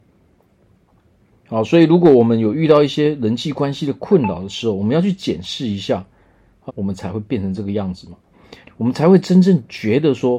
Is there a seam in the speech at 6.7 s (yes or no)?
yes